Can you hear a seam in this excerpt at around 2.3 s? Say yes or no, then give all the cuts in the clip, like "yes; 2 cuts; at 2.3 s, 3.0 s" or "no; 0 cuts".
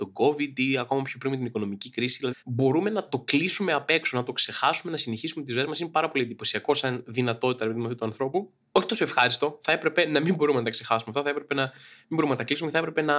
yes; 1 cut; at 2.3 s